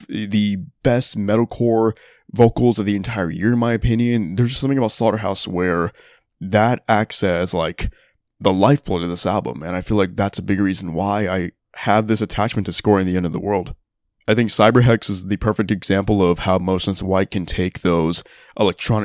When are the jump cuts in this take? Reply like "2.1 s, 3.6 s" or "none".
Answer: none